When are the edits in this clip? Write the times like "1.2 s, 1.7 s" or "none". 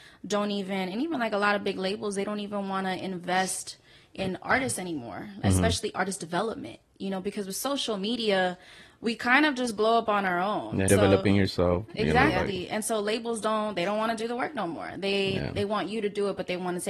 10.9 s